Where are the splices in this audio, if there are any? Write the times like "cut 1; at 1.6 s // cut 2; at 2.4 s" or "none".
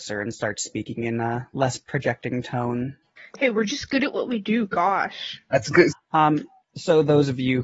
cut 1; at 3.0 s // cut 2; at 5.9 s